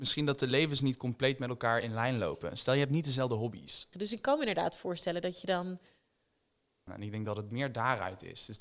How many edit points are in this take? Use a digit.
2